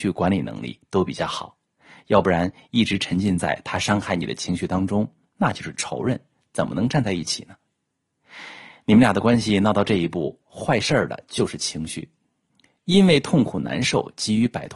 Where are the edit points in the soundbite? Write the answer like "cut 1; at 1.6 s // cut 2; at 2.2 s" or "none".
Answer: none